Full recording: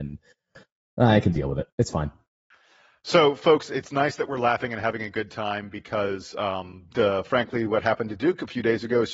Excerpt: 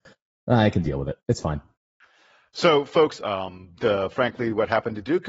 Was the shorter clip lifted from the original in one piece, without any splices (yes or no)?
no